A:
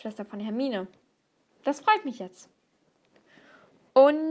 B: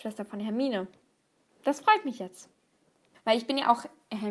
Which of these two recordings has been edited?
B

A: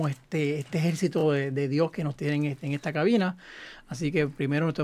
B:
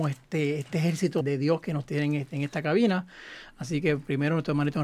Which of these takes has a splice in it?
B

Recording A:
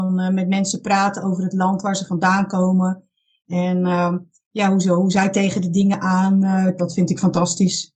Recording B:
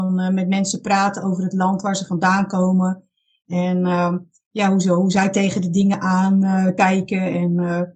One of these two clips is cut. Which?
A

